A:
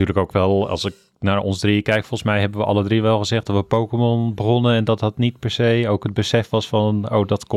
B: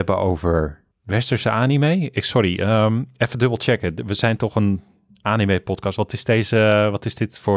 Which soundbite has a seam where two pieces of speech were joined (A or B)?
B